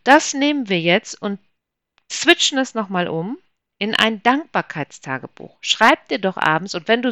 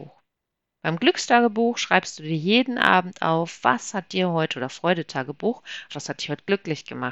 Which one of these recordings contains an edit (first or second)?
second